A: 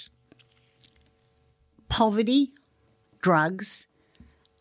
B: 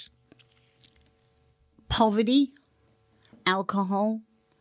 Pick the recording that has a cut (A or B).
A